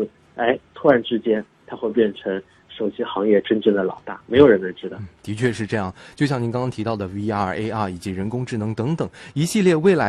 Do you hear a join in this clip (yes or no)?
no